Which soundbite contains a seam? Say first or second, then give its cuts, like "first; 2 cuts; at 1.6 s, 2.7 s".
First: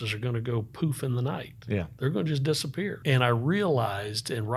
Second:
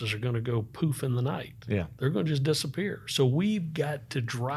first; 1 cut; at 3.0 s